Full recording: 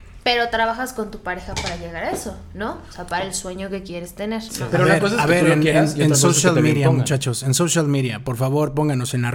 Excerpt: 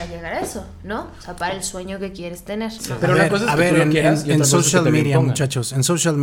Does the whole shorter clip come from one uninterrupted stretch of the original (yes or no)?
yes